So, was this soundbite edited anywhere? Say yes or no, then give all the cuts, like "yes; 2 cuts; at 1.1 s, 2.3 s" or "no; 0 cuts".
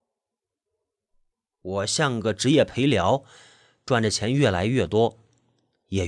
no; 0 cuts